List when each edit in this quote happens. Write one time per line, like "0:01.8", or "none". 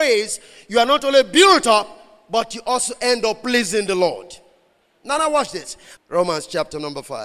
0:06.0